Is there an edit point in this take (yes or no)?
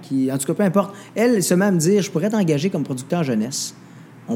no